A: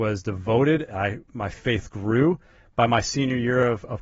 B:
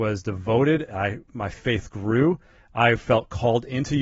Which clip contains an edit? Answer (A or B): A